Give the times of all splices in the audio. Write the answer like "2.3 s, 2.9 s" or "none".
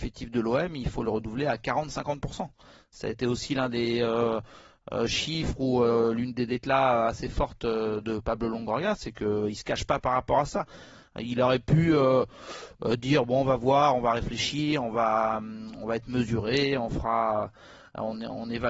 none